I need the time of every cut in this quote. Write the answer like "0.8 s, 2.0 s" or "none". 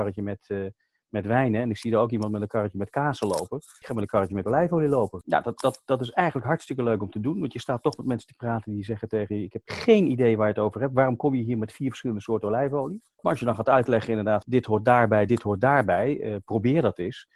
none